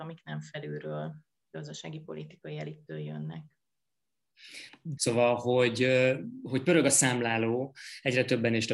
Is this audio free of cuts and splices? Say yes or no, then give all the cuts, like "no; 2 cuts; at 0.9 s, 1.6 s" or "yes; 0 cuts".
no; 1 cut; at 5.0 s